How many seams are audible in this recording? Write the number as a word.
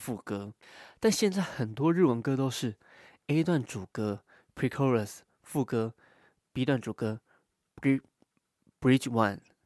zero